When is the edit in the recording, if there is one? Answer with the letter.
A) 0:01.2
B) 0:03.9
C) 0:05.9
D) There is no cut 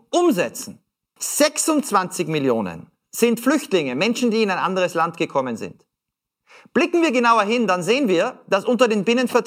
A